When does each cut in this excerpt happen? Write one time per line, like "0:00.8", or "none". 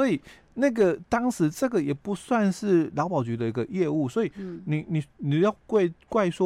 none